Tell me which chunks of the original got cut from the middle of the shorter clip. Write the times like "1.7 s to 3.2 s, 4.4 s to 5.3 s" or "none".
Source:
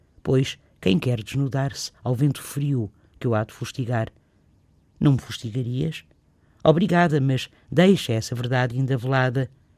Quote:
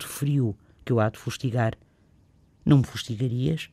none